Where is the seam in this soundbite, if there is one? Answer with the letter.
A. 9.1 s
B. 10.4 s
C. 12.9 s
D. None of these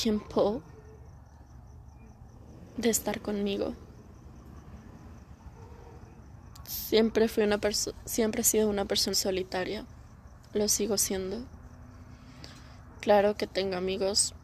A